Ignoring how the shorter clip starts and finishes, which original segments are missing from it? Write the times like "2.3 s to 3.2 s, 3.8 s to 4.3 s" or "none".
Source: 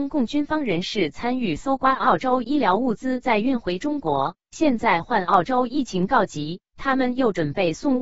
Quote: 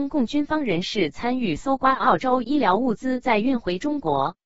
none

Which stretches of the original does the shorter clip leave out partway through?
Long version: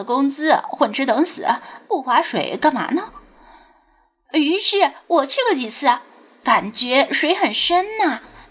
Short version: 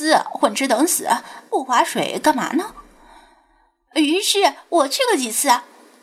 none

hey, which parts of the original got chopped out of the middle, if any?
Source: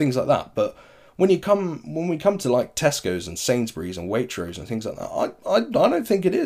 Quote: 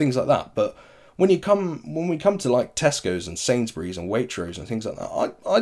none

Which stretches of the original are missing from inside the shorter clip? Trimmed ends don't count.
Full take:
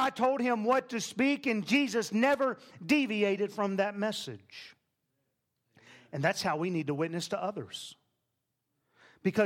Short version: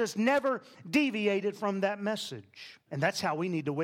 4.8 s to 6.1 s

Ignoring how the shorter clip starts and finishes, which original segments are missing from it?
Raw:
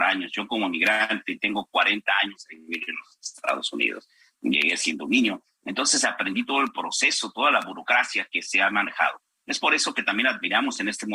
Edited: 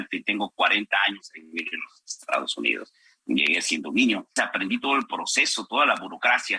5.5 s to 6.0 s

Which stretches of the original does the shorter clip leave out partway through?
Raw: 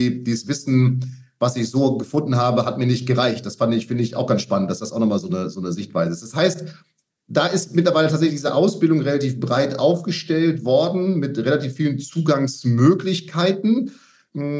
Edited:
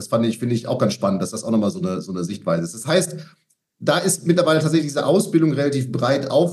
none

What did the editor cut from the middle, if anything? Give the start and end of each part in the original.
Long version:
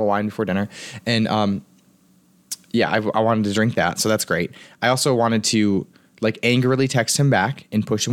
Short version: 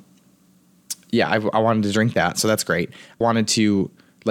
4.8 s to 5.2 s

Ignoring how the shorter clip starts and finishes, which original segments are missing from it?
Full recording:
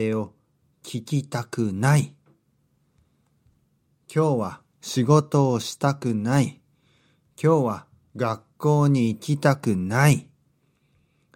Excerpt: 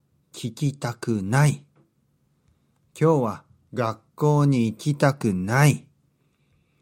3.3 s to 7.2 s

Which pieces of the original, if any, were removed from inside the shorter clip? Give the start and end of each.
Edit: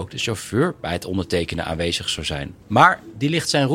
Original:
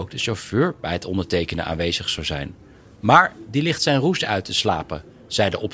2.6 s to 2.9 s

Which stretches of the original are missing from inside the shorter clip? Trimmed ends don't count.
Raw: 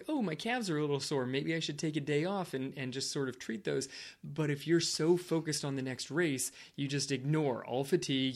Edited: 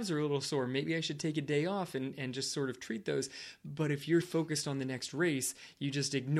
4.8 s to 5.2 s

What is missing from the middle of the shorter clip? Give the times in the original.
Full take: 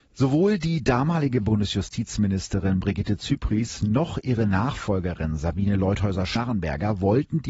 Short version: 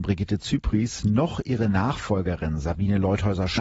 none

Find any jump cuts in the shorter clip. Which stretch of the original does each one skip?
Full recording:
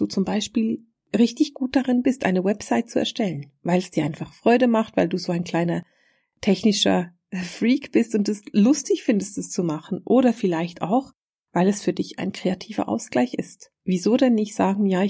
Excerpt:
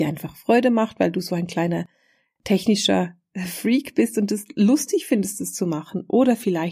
none

